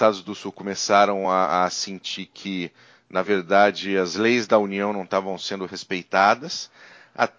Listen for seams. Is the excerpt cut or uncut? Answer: uncut